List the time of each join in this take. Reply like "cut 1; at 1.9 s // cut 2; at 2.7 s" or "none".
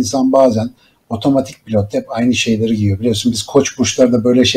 none